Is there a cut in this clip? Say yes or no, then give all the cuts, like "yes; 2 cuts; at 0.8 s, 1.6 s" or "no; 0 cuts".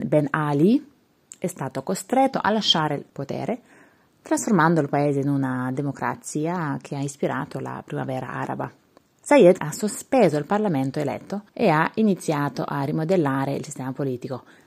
yes; 2 cuts; at 9.6 s, 11.5 s